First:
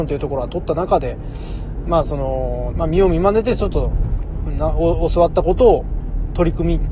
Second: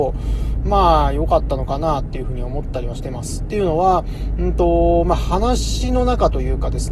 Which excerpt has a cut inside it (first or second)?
first